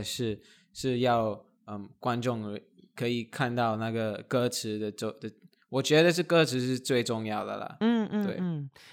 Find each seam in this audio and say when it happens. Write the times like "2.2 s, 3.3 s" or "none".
none